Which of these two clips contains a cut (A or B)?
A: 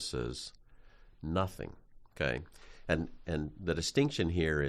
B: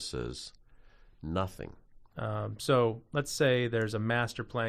B